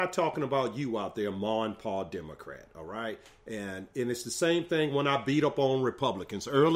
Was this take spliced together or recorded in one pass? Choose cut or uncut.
uncut